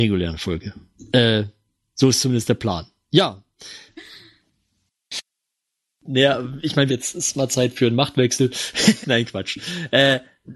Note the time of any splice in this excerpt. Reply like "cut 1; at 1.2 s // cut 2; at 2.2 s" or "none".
cut 1; at 3.9 s // cut 2; at 6.9 s // cut 3; at 9.0 s